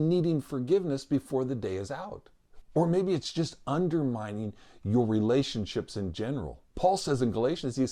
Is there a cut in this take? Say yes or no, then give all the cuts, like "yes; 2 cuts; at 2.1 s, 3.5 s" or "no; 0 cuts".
yes; 2 cuts; at 2.6 s, 6.7 s